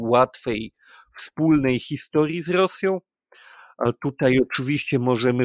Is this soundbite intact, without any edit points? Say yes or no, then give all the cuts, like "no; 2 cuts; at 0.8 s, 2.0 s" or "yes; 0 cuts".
yes; 0 cuts